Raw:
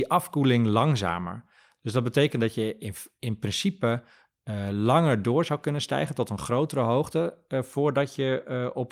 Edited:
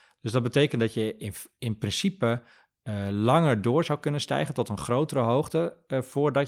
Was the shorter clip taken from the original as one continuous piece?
yes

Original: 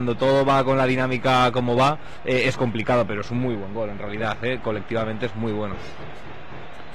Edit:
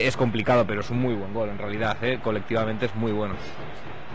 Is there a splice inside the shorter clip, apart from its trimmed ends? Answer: no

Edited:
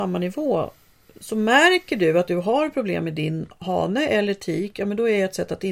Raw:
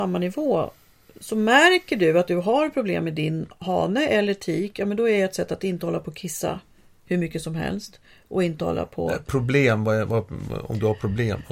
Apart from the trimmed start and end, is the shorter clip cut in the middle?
no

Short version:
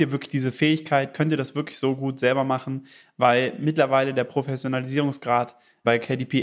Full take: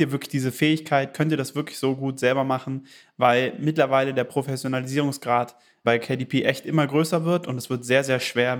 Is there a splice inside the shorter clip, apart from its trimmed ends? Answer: no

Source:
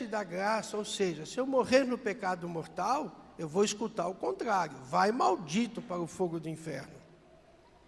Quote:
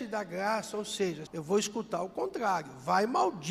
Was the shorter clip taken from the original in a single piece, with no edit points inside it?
no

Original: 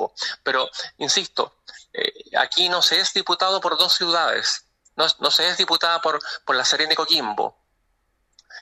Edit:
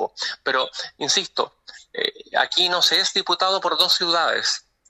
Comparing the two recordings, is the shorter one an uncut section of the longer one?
yes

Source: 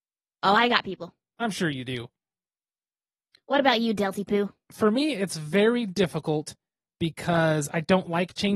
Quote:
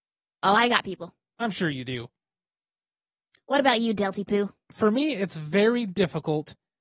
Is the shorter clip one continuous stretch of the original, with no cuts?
yes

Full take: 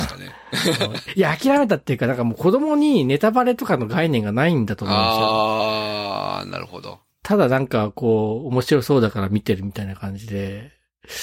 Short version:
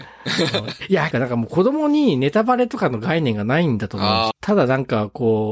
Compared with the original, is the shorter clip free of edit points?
no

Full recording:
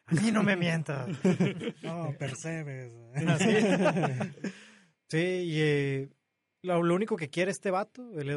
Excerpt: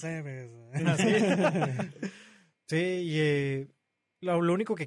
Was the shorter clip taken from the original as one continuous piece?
yes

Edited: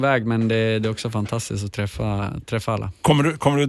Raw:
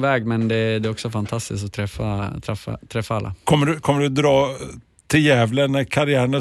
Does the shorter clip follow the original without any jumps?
no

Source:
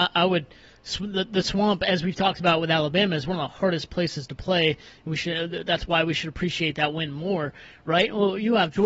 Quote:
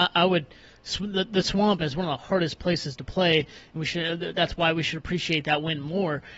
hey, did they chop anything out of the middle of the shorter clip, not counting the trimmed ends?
yes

